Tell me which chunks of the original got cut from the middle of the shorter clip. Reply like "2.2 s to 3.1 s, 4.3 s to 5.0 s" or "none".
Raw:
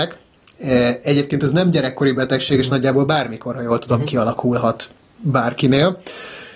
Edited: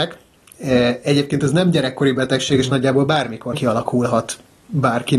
3.5 s to 4.0 s